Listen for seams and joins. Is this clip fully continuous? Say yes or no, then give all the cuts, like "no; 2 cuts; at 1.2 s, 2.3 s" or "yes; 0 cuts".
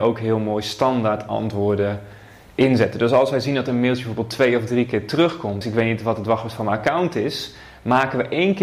no; 1 cut; at 5.6 s